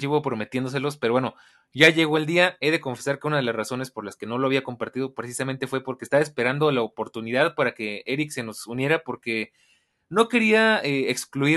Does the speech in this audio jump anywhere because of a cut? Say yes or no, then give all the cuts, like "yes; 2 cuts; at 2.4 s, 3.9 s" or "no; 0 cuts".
no; 0 cuts